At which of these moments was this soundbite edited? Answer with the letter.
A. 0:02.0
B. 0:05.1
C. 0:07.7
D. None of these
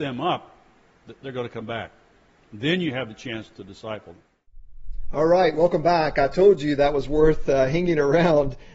D